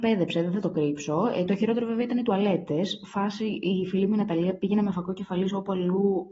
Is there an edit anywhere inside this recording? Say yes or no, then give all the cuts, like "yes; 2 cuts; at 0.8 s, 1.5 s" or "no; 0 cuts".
no; 0 cuts